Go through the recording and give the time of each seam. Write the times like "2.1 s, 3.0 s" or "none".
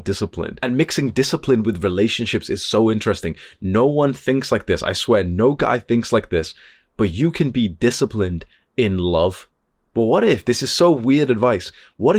9.9 s